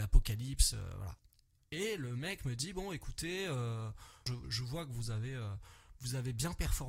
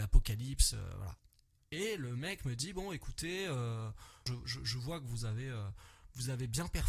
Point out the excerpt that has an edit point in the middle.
first; 1 cut; at 4.4 s

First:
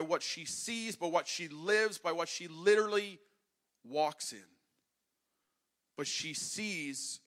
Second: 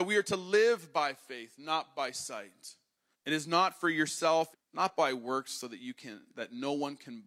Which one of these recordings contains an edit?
second; 2 cuts; at 3.1 s, 4.5 s

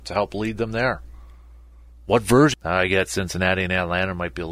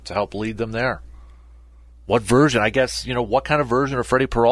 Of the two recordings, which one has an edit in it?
first; 1 cut; at 2.5 s

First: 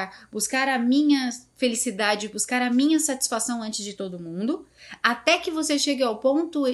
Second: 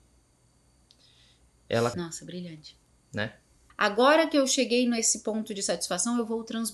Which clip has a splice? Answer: second; 2 cuts; at 1.9 s, 3.7 s

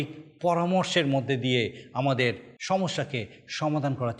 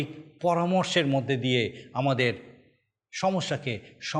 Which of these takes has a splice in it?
first; 1 cut; at 2.6 s

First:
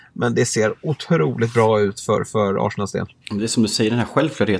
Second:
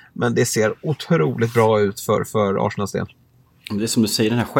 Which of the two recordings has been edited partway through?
first; 1 cut; at 3.2 s

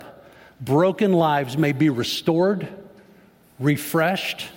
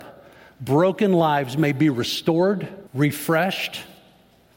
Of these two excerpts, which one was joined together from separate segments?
second; 1 cut; at 2.9 s

